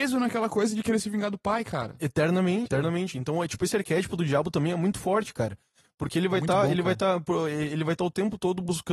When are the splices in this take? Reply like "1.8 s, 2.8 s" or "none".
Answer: 2.7 s